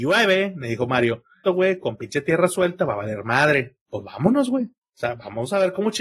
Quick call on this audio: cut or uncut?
cut